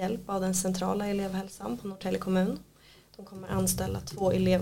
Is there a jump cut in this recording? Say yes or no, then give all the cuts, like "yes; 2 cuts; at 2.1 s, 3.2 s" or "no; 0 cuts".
no; 0 cuts